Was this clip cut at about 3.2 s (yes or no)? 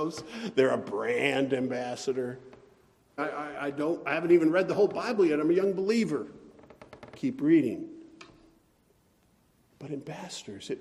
yes